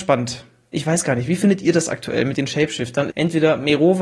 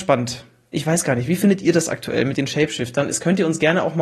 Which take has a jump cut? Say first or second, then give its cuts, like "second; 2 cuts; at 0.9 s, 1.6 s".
first; 1 cut; at 3.1 s